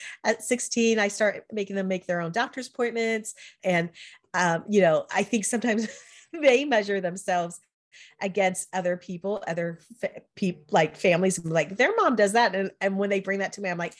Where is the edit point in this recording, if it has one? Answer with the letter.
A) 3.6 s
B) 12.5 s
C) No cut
A